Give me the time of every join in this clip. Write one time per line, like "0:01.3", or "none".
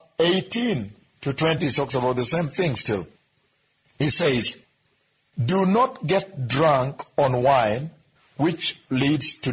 0:01.6